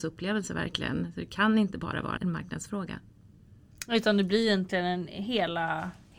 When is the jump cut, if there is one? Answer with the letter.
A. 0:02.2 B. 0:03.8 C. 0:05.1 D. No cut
A